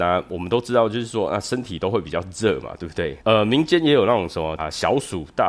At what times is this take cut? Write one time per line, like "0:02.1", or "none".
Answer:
0:03.2
0:04.6